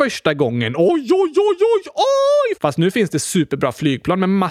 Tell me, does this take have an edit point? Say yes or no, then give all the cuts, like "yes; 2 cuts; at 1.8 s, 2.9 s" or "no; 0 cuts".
yes; 1 cut; at 2.6 s